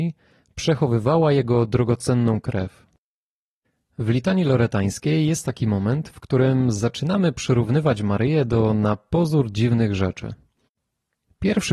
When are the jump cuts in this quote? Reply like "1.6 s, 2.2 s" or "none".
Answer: none